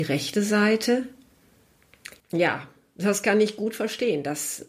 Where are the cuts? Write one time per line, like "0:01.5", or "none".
0:02.2